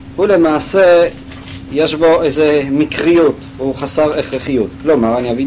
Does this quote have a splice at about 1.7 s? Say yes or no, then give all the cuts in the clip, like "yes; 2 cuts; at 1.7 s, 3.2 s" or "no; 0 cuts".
yes; 1 cut; at 1.7 s